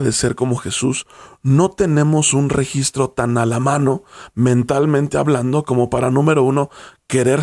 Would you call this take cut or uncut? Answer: uncut